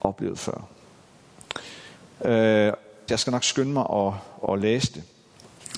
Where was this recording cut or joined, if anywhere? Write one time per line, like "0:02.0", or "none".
0:03.1